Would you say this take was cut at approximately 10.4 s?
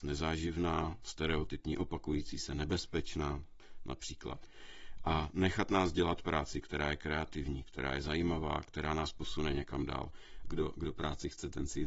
yes; 1 cut; at 10.4 s

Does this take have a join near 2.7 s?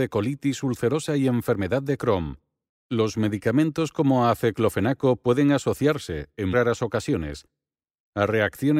yes; 2 cuts; at 2.7 s, 6.5 s

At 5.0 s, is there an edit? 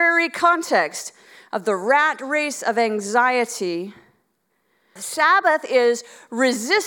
yes; 1 cut; at 5.0 s

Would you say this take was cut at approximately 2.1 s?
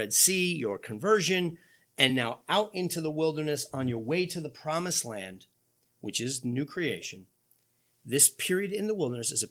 no; 0 cuts

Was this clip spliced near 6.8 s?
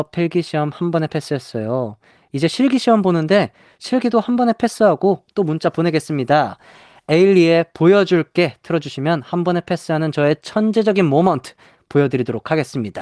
no; 0 cuts

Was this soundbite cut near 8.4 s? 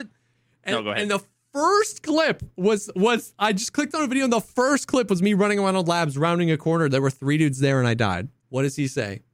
yes; 1 cut; at 8.4 s

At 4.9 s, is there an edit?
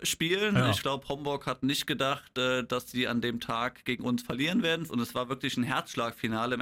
yes; 1 cut; at 4.9 s

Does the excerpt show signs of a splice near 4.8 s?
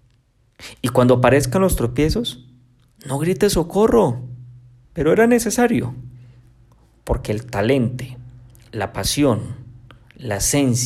yes; 1 cut; at 4.8 s

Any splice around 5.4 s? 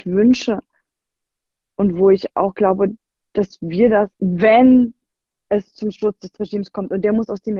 no; 1 cut; at 4.1 s

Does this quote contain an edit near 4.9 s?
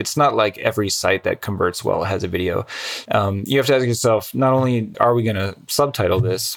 yes; 2 cuts; at 3.1 s, 4.9 s

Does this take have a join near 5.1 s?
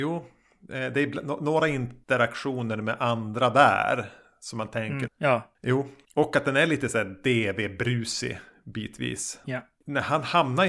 yes; 2 cuts; at 5.1 s, 9.4 s

